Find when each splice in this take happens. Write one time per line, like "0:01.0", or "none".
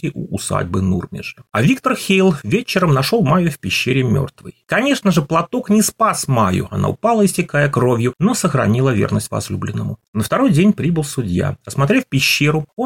0:04.7
0:10.0